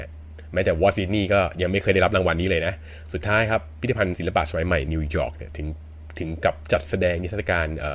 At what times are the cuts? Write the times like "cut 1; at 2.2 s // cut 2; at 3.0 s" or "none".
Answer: cut 1; at 4.9 s